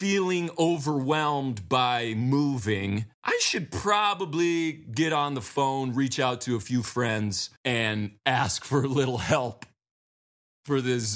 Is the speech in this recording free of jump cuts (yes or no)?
no